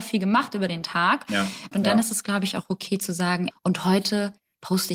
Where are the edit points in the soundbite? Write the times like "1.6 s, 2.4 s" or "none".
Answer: 1.7 s, 3.5 s